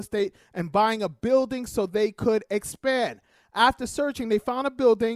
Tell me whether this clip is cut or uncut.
uncut